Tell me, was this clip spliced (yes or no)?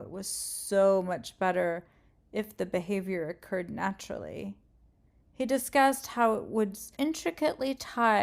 yes